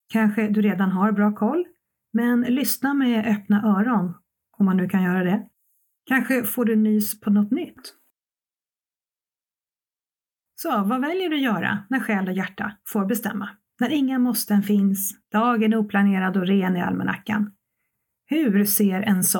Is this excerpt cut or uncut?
uncut